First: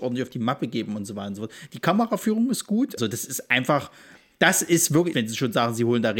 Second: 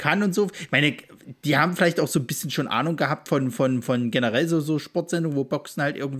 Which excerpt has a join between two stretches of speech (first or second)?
first